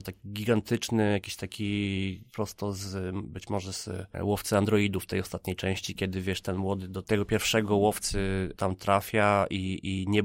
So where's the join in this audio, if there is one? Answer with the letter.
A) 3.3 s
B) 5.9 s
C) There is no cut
C